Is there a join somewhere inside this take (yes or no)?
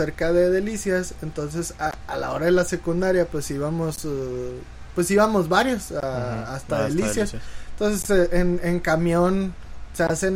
no